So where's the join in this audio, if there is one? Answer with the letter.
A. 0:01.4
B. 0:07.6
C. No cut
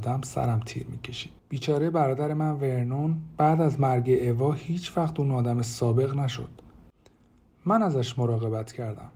A